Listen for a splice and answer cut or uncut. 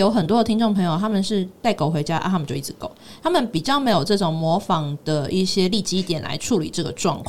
uncut